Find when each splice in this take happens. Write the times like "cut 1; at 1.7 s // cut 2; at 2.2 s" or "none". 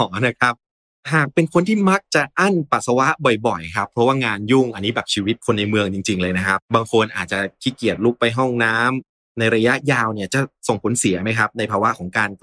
cut 1; at 6.6 s